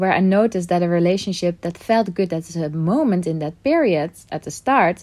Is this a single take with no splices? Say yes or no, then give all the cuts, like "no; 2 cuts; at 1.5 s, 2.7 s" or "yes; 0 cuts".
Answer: yes; 0 cuts